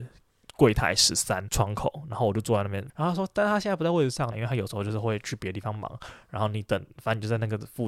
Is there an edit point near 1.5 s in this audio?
yes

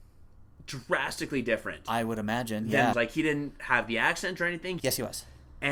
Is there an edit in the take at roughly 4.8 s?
yes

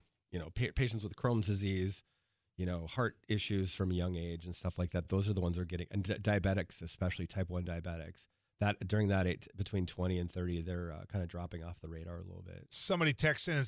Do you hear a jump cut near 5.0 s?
no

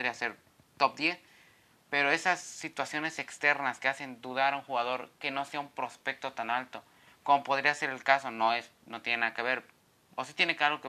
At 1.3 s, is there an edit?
no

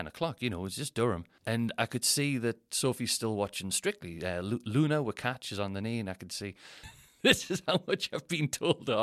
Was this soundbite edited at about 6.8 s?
yes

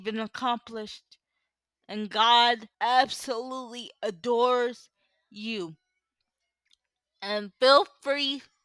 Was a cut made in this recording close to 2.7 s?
yes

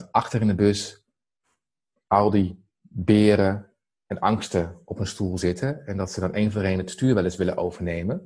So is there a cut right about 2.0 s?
no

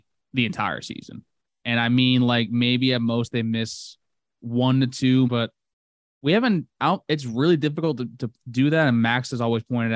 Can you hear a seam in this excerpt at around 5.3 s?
yes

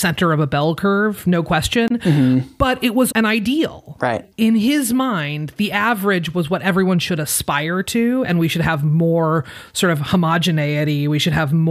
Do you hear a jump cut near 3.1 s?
yes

